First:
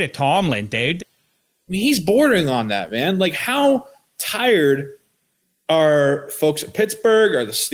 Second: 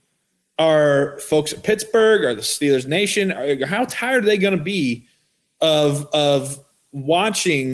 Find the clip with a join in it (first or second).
first